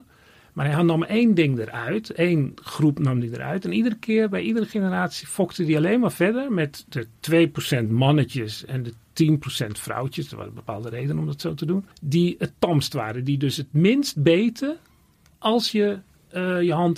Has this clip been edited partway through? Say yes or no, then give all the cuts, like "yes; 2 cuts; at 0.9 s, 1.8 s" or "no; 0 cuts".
yes; 1 cut; at 11.9 s